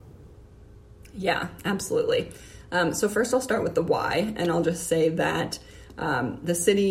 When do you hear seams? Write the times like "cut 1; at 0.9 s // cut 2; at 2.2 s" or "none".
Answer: none